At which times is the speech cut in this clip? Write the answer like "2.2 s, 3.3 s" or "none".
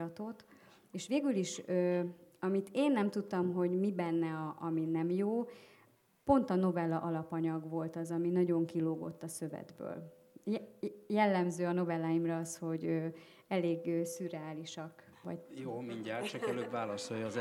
15.2 s